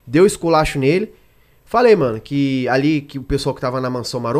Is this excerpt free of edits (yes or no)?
yes